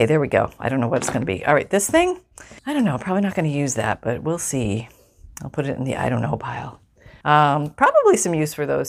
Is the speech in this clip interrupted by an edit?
yes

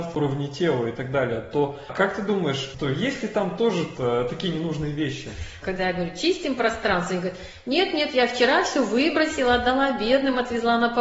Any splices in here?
yes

